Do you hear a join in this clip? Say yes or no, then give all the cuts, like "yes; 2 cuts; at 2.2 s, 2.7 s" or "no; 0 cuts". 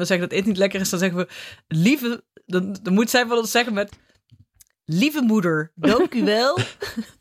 no; 0 cuts